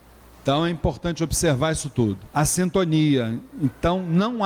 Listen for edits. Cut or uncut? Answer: cut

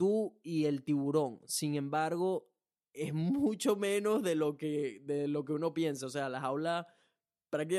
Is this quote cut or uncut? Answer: uncut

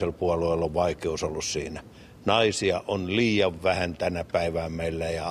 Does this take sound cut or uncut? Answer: uncut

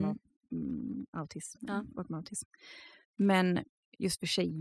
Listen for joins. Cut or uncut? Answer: uncut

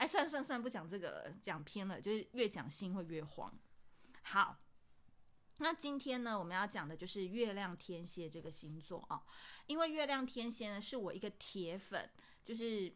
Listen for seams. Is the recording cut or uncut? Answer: uncut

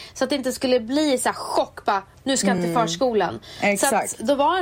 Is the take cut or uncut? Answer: uncut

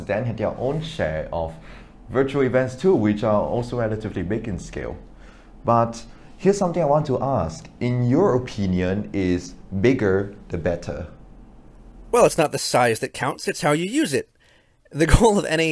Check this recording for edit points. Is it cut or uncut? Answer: uncut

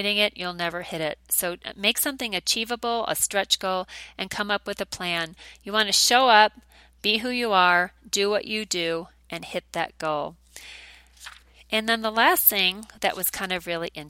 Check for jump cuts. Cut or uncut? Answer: uncut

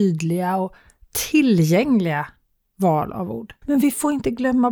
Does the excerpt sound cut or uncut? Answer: cut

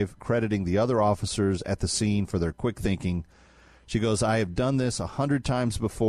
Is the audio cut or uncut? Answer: uncut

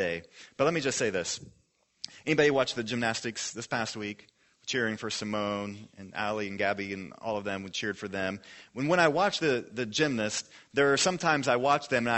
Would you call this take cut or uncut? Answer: uncut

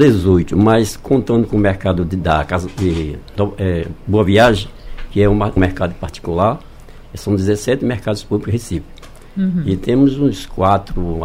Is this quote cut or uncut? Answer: cut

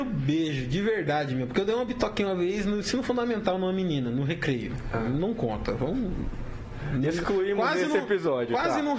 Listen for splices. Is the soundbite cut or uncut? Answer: uncut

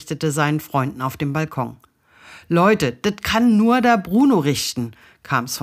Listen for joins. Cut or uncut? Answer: uncut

